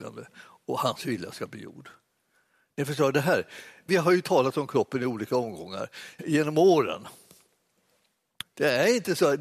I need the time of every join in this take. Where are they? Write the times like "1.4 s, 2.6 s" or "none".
3.9 s, 6.2 s, 8.4 s